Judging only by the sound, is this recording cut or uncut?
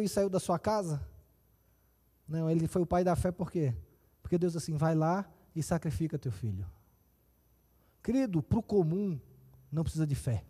uncut